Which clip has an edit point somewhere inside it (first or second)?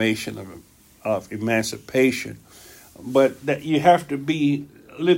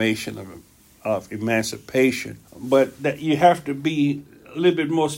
second